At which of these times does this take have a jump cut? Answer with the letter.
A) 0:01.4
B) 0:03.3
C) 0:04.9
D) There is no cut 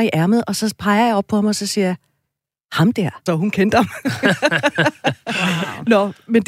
B